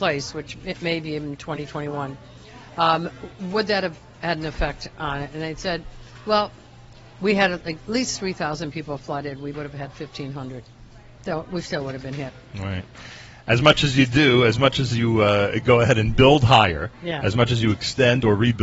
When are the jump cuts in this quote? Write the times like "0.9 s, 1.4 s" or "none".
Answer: 9.5 s

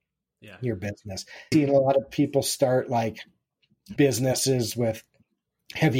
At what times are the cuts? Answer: 1.5 s, 4.0 s

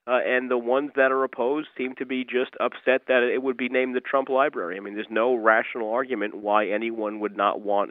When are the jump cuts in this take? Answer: none

